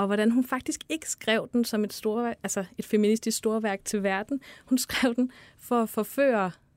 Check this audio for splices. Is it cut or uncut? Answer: uncut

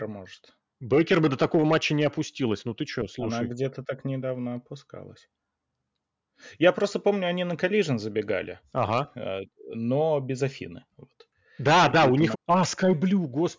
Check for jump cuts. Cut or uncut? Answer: cut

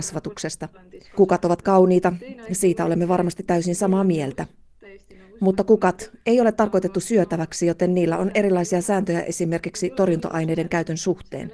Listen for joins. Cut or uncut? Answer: uncut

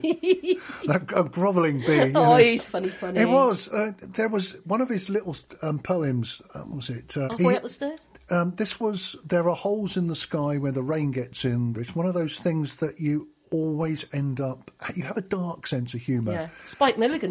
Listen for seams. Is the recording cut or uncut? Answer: cut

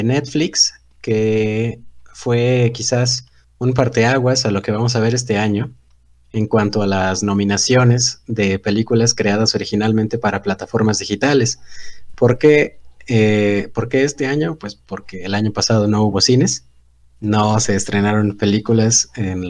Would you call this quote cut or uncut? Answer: uncut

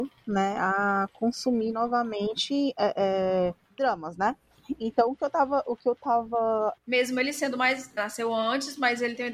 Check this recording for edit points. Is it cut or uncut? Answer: cut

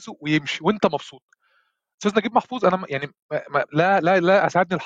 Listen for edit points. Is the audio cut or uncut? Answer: uncut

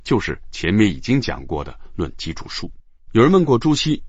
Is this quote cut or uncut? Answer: cut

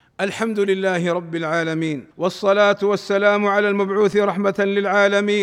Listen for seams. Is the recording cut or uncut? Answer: cut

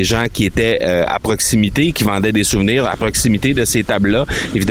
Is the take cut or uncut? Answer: cut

